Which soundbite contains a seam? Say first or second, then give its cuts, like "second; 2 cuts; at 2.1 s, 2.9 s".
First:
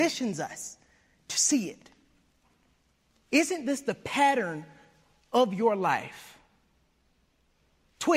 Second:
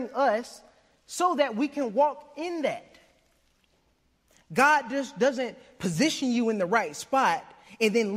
first; 1 cut; at 3.1 s